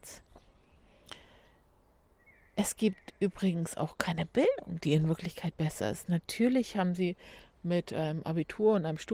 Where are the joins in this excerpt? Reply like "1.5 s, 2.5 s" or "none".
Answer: none

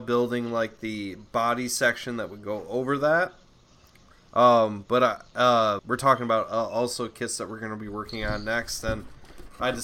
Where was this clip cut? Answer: 5.8 s

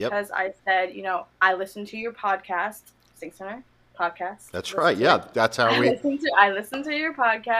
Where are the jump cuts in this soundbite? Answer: 1.3 s

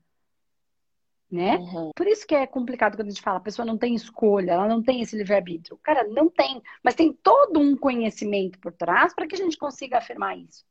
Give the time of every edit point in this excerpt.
1.9 s

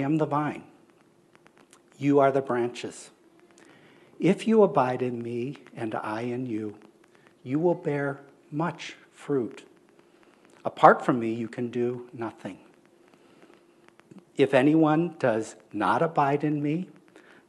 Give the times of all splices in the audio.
none

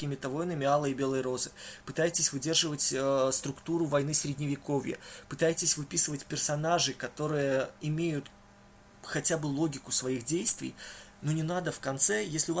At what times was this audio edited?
none

